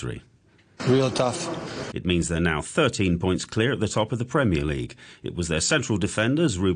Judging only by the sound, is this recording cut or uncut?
cut